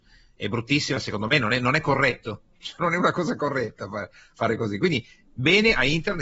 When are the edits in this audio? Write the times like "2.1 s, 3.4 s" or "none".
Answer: 2.8 s